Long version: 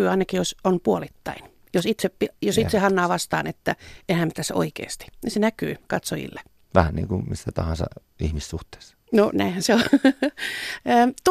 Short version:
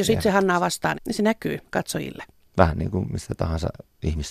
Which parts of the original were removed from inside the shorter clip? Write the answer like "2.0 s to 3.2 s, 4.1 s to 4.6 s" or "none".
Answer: 3.4 s to 5.1 s